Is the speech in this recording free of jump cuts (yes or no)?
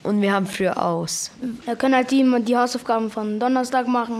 no